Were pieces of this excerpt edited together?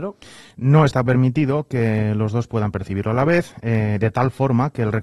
no; 0 cuts

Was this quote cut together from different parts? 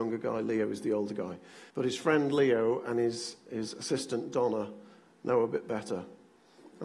yes; 1 cut; at 1.7 s

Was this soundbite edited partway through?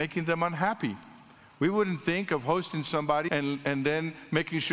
yes; 1 cut; at 3.3 s

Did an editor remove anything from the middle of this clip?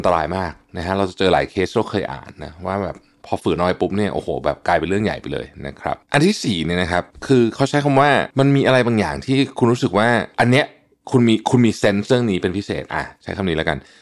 no; 0 cuts

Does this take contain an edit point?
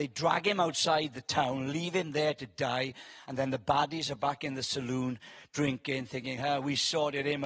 no; 0 cuts

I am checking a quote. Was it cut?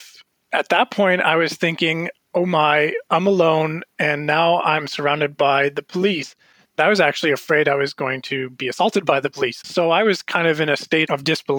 yes; 2 cuts; at 6.7 s, 9.6 s

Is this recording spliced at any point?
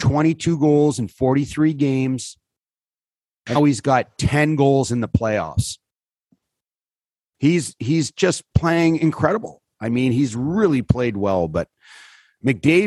yes; 1 cut; at 3.5 s

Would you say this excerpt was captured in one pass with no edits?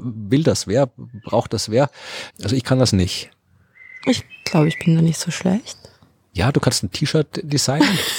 no; 1 cut; at 2.3 s

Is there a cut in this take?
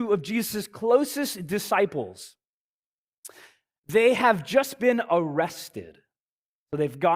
no; 0 cuts

